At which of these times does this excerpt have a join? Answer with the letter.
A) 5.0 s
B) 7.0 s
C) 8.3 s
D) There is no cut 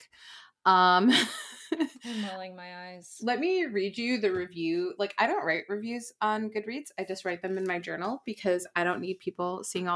D